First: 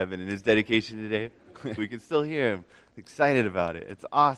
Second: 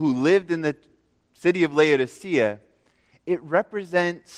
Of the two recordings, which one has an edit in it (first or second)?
first